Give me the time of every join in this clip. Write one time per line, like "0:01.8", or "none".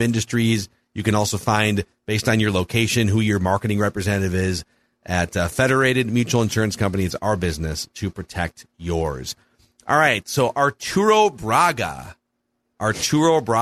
none